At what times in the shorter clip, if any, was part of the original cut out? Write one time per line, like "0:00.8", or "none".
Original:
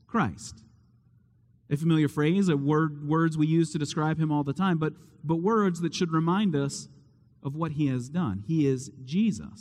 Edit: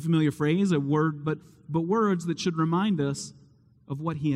0:01.2